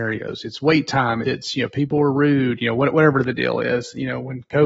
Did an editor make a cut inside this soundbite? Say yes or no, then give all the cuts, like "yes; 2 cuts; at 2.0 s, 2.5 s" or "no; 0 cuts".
yes; 1 cut; at 1.2 s